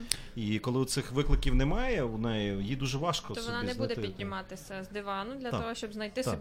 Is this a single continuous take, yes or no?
yes